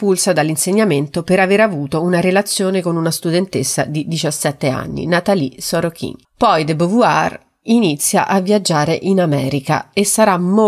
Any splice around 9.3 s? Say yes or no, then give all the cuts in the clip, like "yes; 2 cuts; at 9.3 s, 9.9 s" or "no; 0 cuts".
no; 1 cut; at 6.2 s